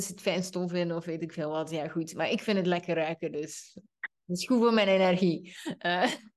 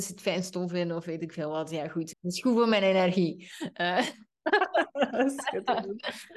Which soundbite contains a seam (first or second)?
second